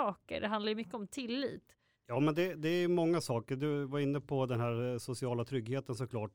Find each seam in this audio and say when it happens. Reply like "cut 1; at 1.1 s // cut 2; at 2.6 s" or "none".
cut 1; at 1.9 s

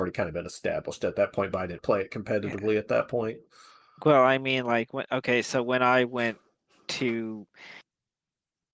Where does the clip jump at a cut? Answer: cut 1; at 1.8 s

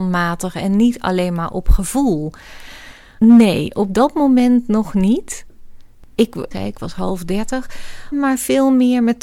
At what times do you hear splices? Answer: cut 1; at 3.2 s // cut 2; at 6.5 s // cut 3; at 8.1 s

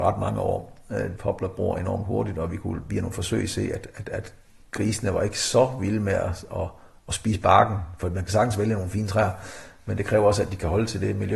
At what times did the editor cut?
cut 1; at 1.2 s

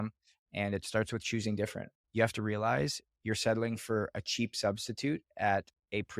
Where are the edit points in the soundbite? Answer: cut 1; at 2.0 s

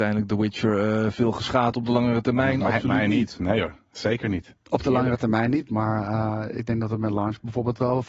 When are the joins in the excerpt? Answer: none

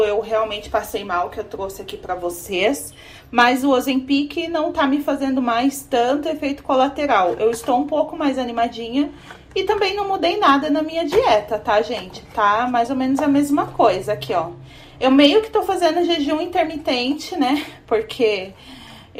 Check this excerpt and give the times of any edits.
none

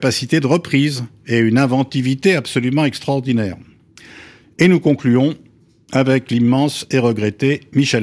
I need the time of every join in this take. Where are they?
cut 1; at 4.4 s

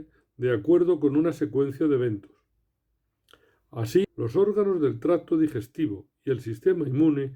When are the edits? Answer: cut 1; at 4.0 s

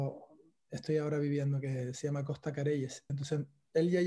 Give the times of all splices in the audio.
cut 1; at 3.1 s

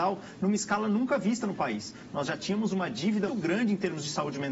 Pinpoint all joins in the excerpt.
cut 1; at 3.3 s

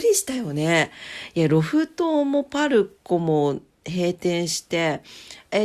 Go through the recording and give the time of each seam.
none

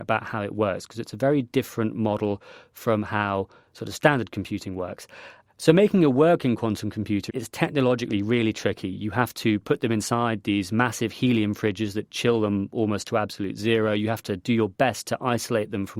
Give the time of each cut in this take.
cut 1; at 7.3 s

